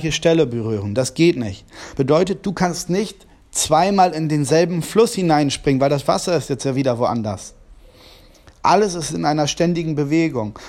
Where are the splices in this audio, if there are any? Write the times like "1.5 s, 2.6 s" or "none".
none